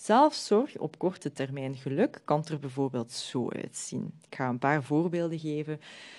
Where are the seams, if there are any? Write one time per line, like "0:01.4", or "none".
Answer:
none